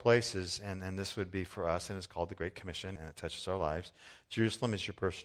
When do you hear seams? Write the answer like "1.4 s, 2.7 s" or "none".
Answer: 3.0 s

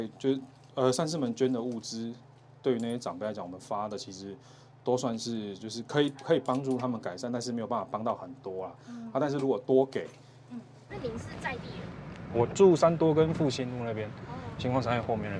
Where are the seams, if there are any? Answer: 10.9 s

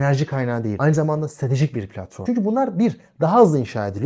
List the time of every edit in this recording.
2.3 s

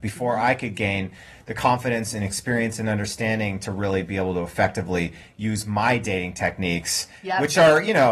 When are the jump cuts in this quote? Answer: none

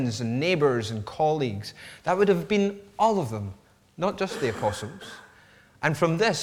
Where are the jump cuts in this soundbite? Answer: none

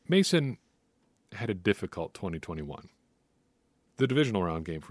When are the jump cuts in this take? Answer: 3.9 s

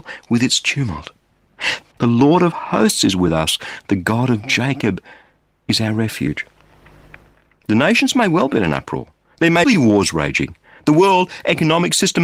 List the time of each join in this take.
1.9 s, 9.6 s

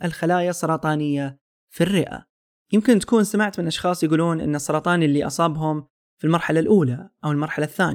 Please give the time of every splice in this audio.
2.6 s

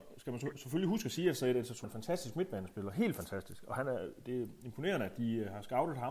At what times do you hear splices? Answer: 1.8 s

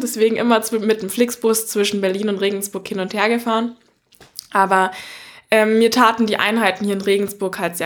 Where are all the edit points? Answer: none

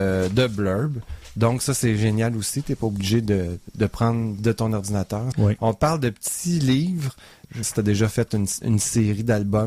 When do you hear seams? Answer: 5.3 s, 7.6 s

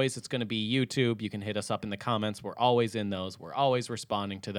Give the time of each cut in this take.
none

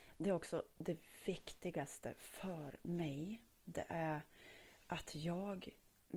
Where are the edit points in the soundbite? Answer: none

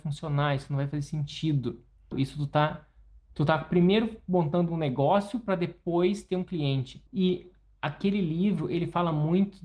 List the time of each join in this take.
2.1 s, 7.1 s

